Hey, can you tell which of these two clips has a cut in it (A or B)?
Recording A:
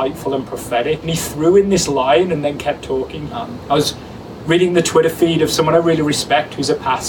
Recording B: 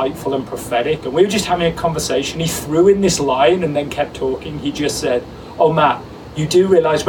A